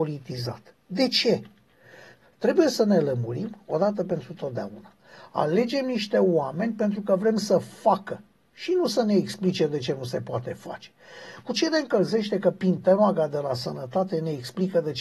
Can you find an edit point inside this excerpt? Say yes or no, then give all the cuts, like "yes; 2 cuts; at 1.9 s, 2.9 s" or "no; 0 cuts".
no; 0 cuts